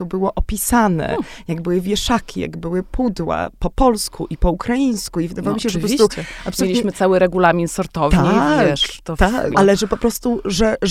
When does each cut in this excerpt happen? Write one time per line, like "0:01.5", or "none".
0:09.5